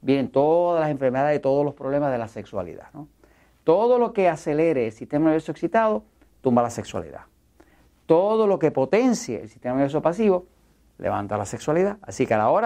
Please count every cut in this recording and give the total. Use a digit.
0